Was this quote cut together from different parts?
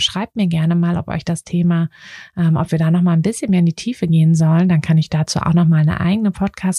no; 0 cuts

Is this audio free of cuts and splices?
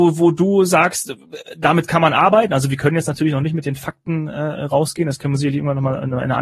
yes; 0 cuts

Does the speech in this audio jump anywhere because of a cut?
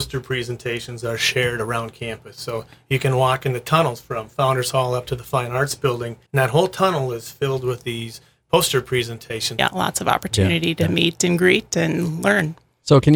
yes; 2 cuts; at 6.3 s, 9.6 s

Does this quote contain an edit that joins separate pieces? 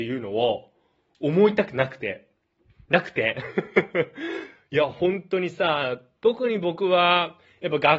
no; 0 cuts

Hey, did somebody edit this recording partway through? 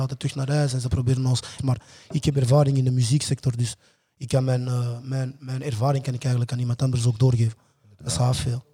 yes; 1 cut; at 1.6 s

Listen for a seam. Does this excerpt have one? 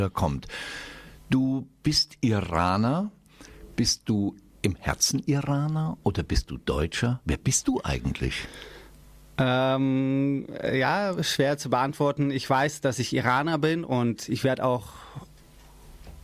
no; 0 cuts

